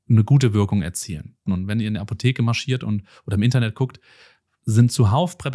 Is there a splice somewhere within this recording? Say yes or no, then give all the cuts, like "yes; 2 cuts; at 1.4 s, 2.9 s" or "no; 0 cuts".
yes; 1 cut; at 1.5 s